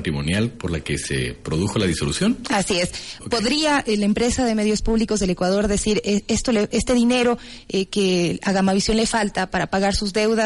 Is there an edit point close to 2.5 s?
no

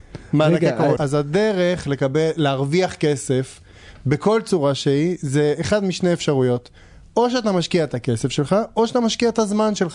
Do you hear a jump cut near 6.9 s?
no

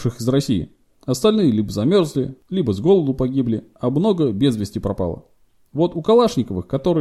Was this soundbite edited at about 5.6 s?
no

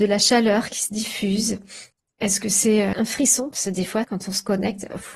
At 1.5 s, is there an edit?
no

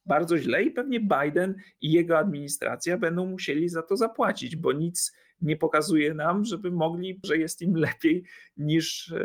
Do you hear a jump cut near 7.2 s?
yes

